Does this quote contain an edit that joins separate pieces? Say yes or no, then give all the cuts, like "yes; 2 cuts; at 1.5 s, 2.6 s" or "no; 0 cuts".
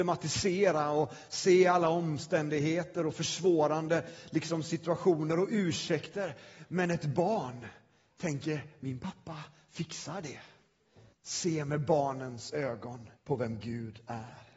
yes; 2 cuts; at 11.1 s, 13.2 s